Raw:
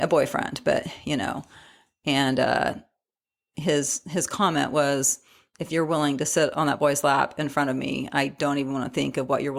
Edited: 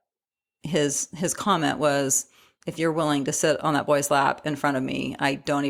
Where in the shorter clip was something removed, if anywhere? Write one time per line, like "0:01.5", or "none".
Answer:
none